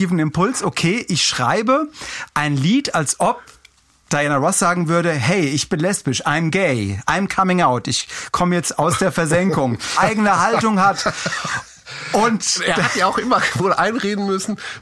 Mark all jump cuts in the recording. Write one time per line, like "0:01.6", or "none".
0:10.0